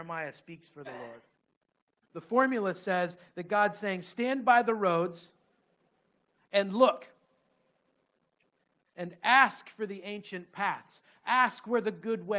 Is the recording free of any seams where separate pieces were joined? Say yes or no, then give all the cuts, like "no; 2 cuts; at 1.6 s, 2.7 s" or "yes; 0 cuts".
no; 1 cut; at 2.0 s